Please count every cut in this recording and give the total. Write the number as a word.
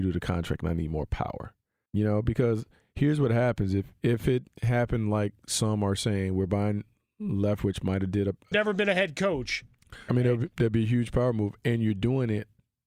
three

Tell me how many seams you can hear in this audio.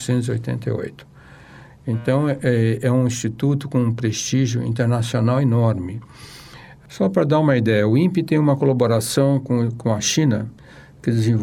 zero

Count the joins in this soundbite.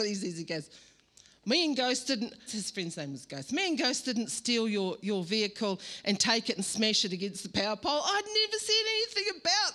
one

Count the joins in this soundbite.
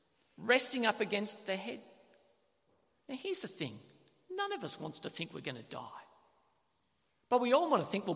zero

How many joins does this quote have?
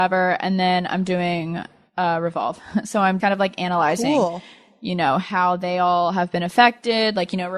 one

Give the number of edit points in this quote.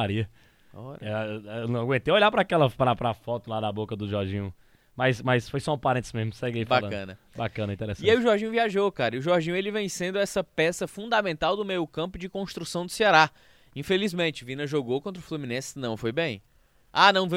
zero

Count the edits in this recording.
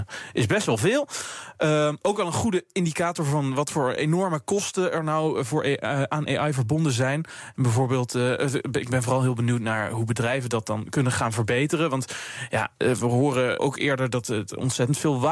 one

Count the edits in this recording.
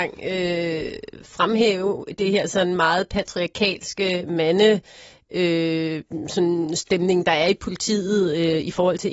zero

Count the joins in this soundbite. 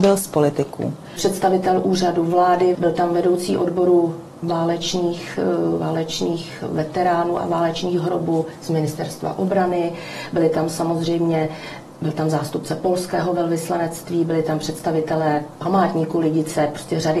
one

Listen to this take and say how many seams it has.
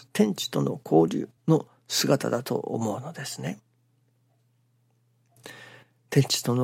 one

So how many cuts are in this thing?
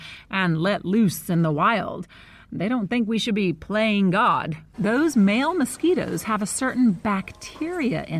one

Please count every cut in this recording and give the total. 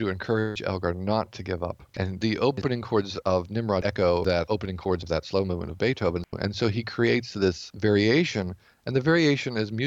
two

